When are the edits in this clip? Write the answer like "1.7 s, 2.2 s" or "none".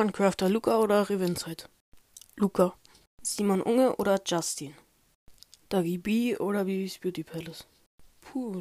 5.6 s